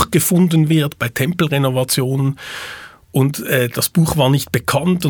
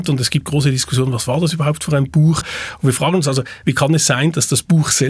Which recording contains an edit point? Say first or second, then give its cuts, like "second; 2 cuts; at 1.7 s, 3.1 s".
second; 2 cuts; at 2.4 s, 3.6 s